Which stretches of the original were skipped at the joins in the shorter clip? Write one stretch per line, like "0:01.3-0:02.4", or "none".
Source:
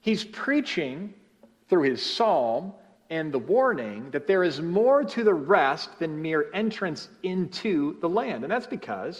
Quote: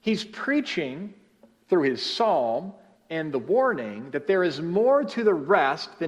none